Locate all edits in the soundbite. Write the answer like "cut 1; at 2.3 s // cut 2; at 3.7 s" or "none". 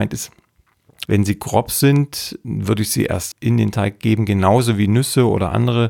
cut 1; at 1.1 s // cut 2; at 3.3 s

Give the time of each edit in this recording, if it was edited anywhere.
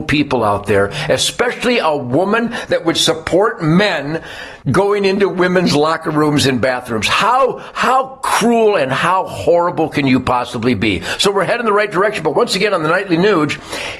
cut 1; at 4.6 s

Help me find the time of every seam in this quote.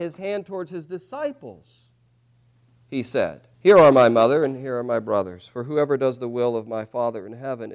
cut 1; at 3.5 s

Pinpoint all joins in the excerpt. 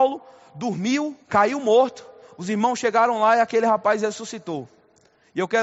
cut 1; at 1.2 s

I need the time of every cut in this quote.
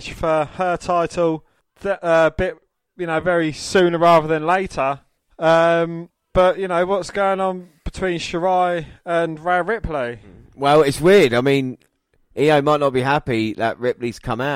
none

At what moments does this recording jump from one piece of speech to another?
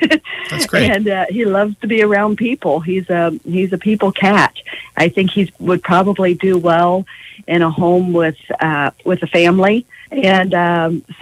cut 1; at 10.1 s

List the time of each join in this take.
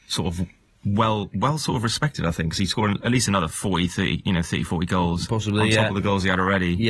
none

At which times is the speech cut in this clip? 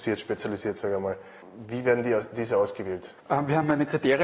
cut 1; at 3.2 s

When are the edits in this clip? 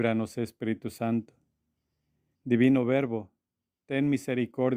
cut 1; at 2.4 s

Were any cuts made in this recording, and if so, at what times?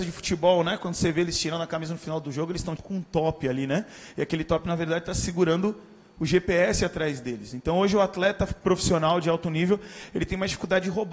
cut 1; at 2.8 s

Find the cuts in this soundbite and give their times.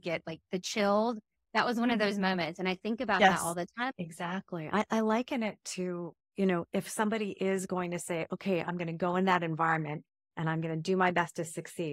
cut 1; at 3.9 s

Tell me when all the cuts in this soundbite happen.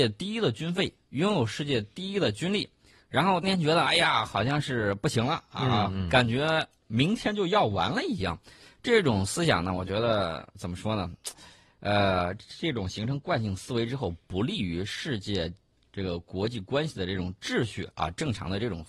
cut 1; at 3.4 s

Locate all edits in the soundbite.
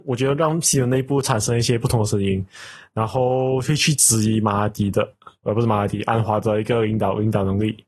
none

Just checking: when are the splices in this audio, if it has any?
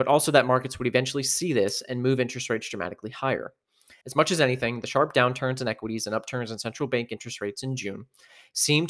cut 1; at 4.0 s

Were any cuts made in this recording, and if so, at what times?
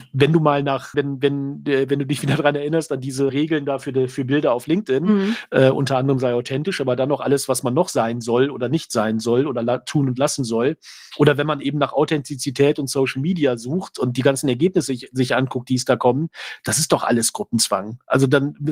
cut 1; at 0.9 s // cut 2; at 3.3 s

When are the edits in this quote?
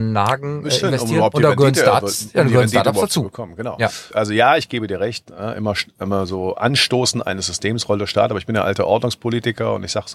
cut 1; at 4.1 s

